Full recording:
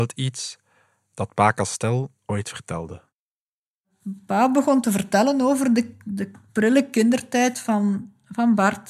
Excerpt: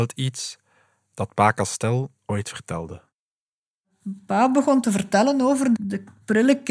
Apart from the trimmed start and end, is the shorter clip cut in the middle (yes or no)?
yes